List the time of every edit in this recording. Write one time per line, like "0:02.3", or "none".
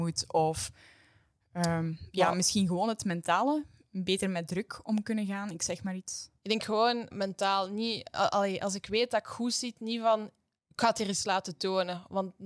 0:07.1

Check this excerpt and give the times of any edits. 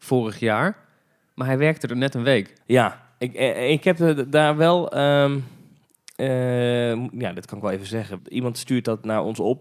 0:02.6
0:08.2

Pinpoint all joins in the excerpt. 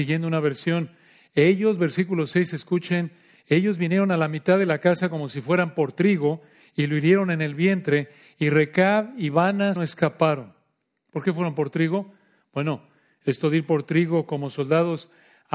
0:09.8

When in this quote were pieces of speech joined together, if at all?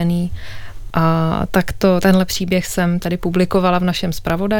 0:00.9

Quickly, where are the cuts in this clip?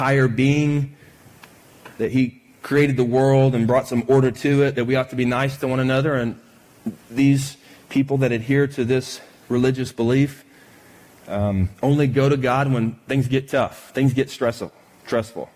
none

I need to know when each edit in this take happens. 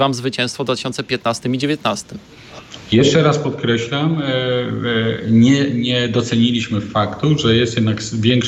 none

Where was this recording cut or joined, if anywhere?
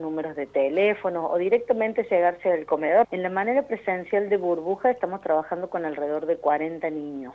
0:03.0

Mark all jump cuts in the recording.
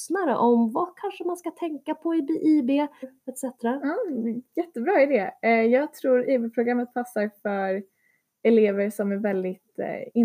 0:03.0

